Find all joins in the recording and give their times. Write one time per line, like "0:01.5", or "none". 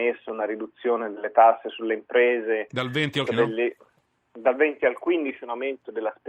0:03.3